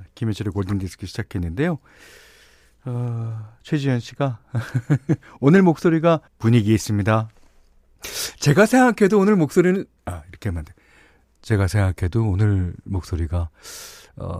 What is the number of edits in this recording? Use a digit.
1